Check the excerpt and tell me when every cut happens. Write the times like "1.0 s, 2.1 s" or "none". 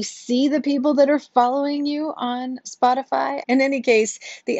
3.4 s

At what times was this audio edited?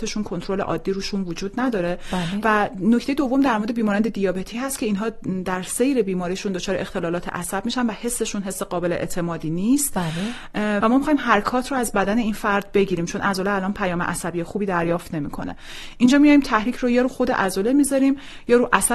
2.4 s, 10.8 s

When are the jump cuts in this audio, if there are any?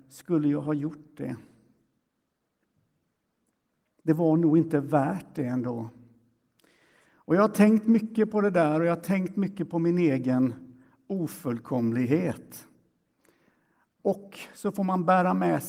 none

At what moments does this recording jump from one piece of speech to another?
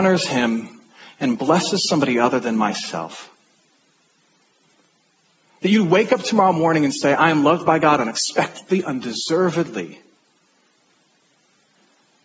none

